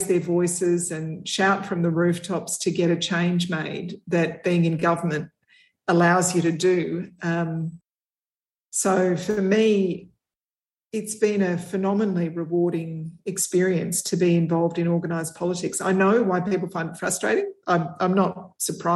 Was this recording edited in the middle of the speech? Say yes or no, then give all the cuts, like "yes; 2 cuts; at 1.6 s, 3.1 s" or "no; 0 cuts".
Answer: no; 0 cuts